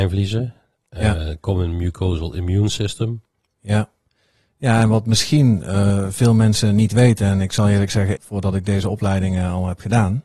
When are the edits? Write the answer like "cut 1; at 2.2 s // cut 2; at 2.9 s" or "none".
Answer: cut 1; at 8.2 s